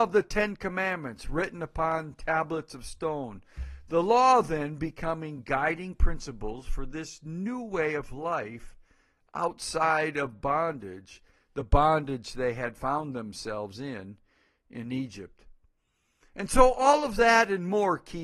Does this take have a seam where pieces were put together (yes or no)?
no